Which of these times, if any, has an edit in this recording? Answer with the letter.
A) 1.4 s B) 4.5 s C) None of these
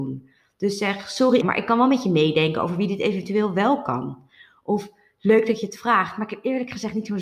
A